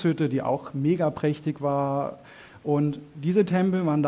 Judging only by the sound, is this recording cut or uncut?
uncut